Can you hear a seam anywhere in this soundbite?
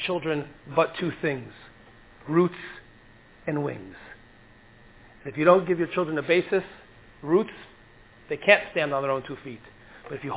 no; 0 cuts

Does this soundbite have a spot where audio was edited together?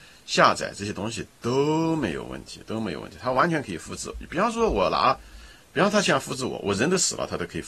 no; 0 cuts

